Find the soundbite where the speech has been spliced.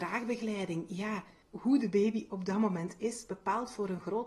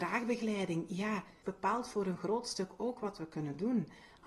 second; 1 cut; at 1.4 s

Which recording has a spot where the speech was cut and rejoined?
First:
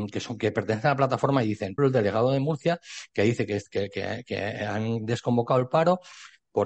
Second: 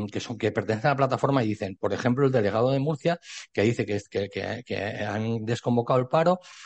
first; 1 cut; at 1.8 s

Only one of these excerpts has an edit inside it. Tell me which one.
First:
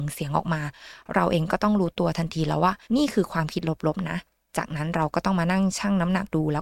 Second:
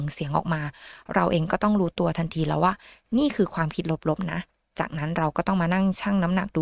first; 1 cut; at 2.8 s

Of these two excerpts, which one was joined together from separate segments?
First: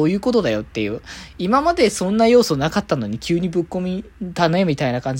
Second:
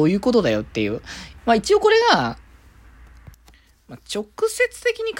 second; 1 cut; at 1.4 s

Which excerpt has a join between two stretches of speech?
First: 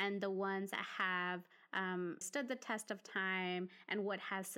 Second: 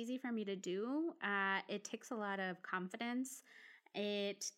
first; 1 cut; at 2.2 s

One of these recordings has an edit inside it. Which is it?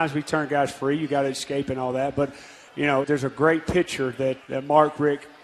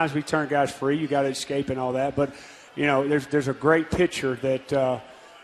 first; 2 cuts; at 3.0 s, 4.4 s

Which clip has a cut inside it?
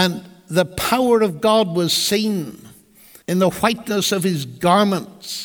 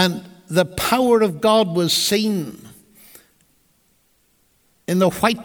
first; 1 cut; at 3.2 s

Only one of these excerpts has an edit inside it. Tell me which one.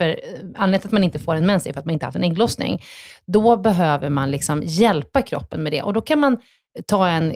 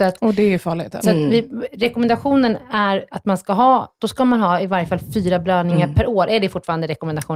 second; 2 cuts; at 1.0 s, 4.0 s

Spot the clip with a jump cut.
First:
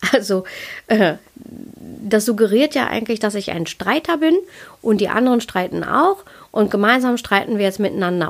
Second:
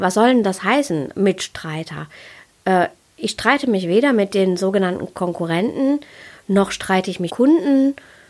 second; 1 cut; at 7.3 s

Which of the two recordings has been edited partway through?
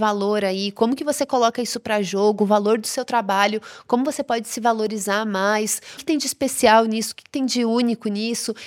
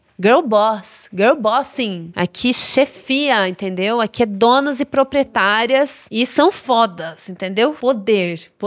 first; 1 cut; at 6.0 s

